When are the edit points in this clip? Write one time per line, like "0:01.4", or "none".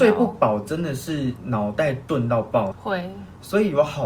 0:02.7